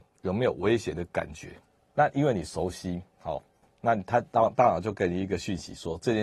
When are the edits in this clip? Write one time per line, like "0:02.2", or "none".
0:01.8
0:03.1